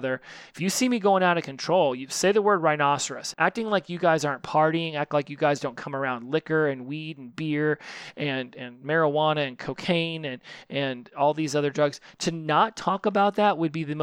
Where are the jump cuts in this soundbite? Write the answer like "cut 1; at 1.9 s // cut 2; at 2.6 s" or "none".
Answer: cut 1; at 3.3 s // cut 2; at 8.5 s